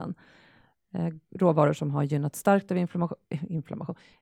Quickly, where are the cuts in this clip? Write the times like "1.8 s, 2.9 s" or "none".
1.3 s